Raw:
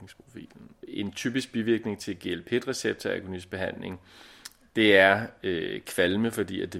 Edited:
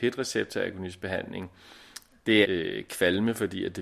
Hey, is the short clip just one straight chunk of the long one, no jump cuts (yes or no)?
no